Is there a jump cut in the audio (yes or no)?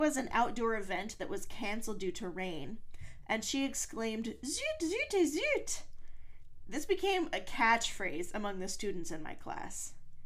no